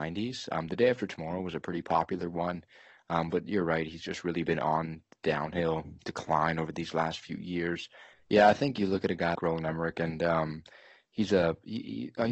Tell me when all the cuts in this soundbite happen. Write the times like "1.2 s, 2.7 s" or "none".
8.1 s, 9.4 s